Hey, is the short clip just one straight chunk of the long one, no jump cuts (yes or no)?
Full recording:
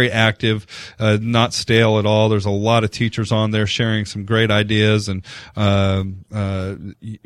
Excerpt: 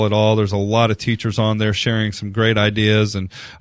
yes